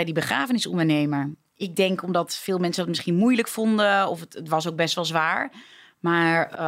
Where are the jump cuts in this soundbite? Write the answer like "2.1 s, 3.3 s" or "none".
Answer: none